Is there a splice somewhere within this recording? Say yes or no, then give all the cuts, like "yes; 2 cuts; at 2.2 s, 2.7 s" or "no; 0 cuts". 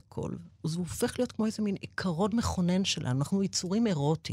no; 0 cuts